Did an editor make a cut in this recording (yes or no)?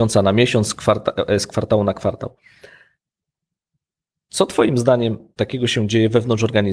no